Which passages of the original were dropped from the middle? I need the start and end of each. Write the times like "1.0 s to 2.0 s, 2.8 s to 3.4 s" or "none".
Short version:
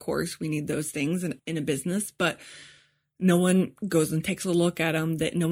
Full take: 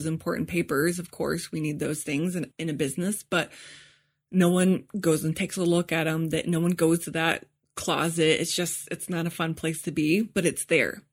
none

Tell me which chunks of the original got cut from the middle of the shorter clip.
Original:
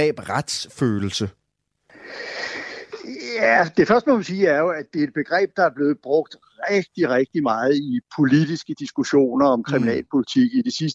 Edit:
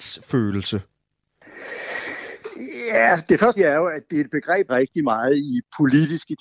4.0 s to 4.4 s, 5.5 s to 7.1 s

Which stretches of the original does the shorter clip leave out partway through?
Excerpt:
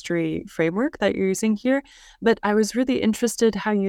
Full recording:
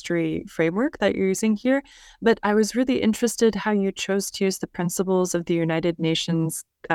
none

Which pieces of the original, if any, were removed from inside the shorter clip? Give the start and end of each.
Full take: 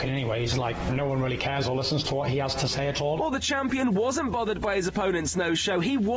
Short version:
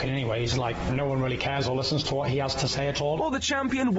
none

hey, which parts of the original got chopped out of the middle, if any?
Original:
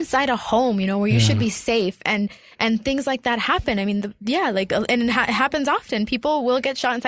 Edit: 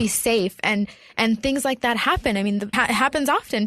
4.2 s to 5.1 s

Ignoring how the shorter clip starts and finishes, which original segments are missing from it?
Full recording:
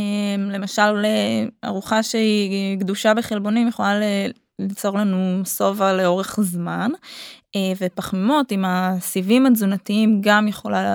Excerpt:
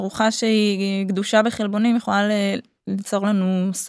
none

